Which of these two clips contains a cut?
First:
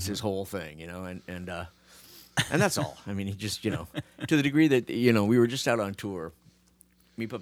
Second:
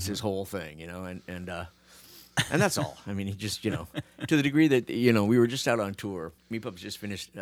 second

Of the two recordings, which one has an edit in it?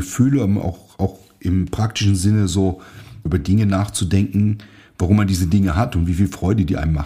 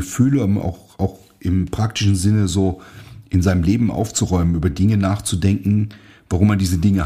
first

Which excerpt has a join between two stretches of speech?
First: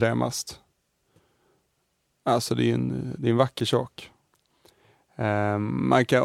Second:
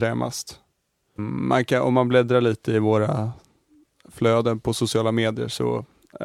second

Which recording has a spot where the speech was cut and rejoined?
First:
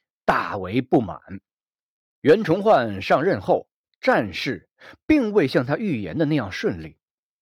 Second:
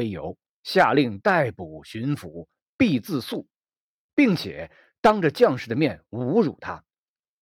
first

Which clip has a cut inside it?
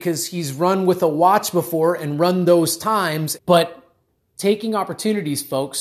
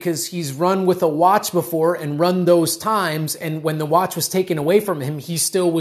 first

